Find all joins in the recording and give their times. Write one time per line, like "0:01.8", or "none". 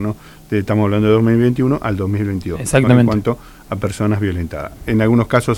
none